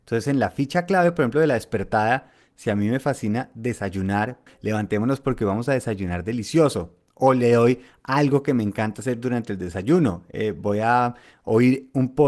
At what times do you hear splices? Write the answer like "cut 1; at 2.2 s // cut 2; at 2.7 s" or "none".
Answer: cut 1; at 4.5 s